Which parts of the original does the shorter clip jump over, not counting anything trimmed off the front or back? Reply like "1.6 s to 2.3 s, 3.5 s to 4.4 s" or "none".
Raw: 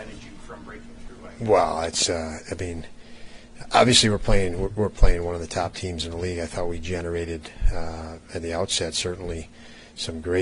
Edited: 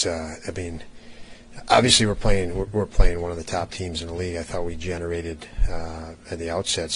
none